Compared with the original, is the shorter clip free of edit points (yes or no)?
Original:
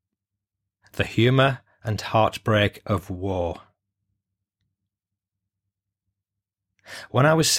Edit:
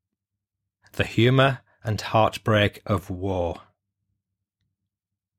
yes